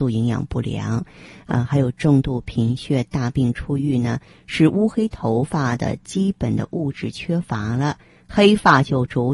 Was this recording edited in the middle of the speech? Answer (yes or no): yes